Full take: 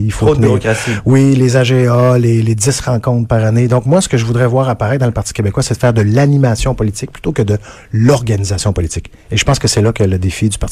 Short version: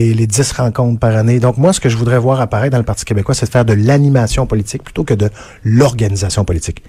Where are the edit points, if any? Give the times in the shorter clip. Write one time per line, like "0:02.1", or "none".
none